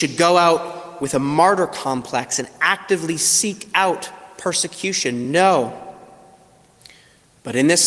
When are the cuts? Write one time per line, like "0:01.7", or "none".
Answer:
none